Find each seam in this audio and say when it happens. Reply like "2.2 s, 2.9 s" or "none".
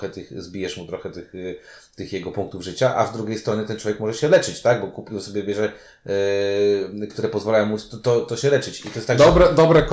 7.1 s